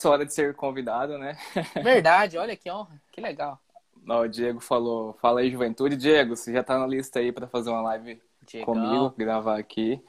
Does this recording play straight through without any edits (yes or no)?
yes